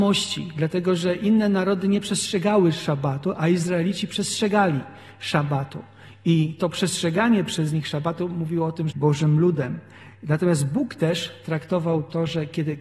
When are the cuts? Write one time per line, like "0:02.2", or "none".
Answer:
0:08.9